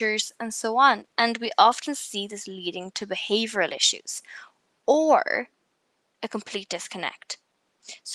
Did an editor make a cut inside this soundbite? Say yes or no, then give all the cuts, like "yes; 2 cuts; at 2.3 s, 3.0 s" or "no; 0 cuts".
no; 0 cuts